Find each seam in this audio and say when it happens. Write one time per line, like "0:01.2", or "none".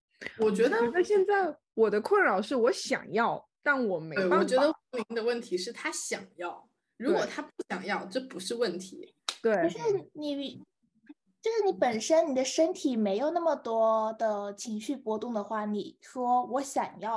none